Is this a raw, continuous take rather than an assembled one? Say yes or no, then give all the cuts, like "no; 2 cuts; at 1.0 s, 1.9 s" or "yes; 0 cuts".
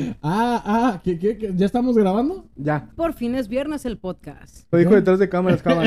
no; 2 cuts; at 2.9 s, 4.7 s